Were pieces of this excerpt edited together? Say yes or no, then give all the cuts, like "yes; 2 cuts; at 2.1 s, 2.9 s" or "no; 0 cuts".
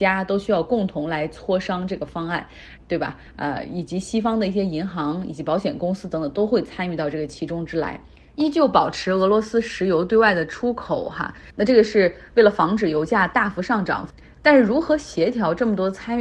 yes; 1 cut; at 2.8 s